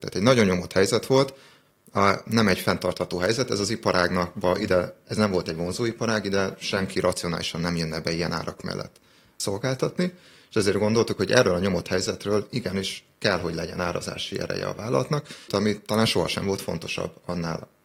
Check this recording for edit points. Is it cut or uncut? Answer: cut